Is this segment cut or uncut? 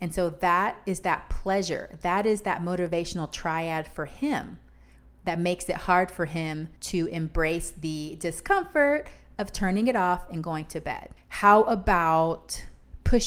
cut